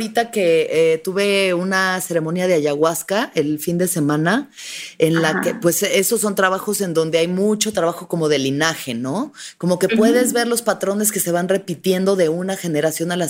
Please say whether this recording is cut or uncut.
uncut